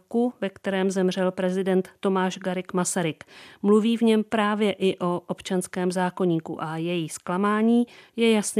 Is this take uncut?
yes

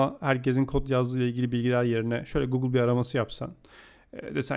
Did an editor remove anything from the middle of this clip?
no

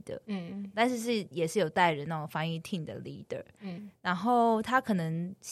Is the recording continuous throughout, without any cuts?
yes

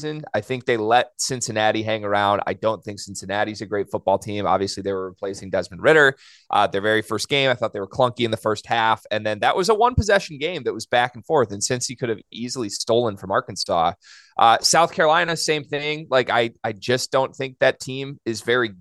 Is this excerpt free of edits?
yes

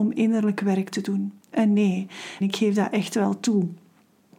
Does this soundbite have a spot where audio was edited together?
yes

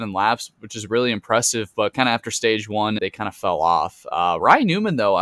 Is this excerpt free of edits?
no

